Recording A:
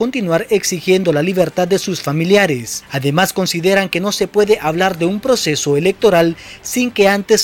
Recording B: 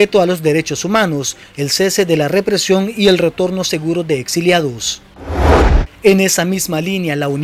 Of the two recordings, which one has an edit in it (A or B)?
B